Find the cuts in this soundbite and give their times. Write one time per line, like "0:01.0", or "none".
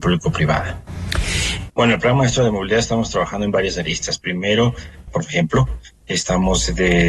0:01.7
0:05.1

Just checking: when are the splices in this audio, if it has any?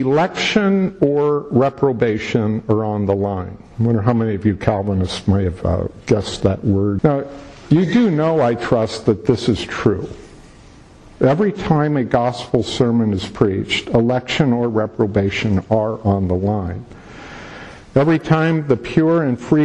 0:07.0

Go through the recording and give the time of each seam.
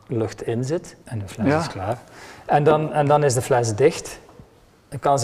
0:01.0

